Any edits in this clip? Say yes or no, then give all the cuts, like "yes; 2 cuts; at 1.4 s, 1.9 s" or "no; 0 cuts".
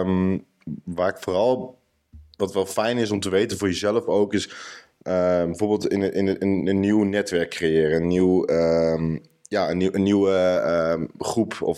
no; 0 cuts